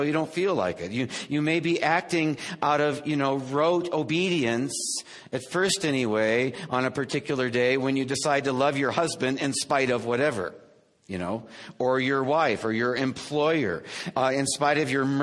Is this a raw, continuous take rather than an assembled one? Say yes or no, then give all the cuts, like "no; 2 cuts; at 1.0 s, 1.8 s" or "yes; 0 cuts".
yes; 0 cuts